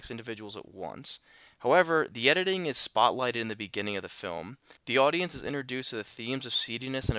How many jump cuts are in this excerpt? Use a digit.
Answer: 0